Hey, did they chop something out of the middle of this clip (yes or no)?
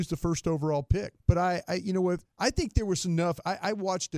yes